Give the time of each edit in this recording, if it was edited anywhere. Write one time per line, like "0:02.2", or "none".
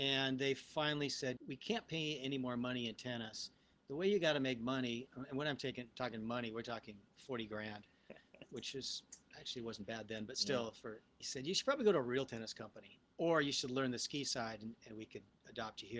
none